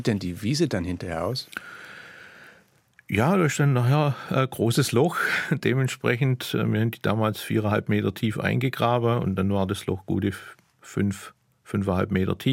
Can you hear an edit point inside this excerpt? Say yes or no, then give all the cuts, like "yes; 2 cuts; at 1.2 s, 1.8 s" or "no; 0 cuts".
no; 0 cuts